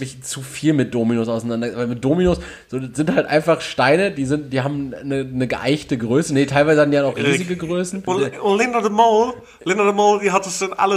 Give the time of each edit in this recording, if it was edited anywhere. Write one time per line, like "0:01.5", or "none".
0:08.1